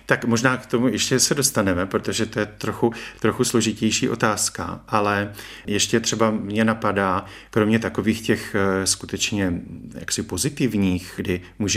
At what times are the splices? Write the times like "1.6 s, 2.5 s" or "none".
none